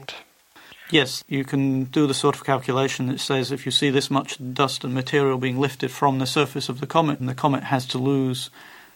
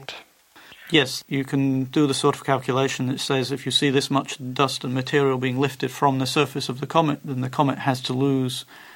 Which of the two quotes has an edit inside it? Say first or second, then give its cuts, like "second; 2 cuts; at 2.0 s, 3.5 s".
first; 1 cut; at 7.2 s